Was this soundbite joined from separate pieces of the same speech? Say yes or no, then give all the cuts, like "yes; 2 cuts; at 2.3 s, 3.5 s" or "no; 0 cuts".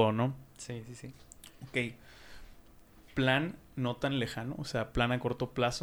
no; 0 cuts